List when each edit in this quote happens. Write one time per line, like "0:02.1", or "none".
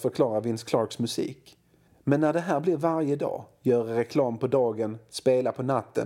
none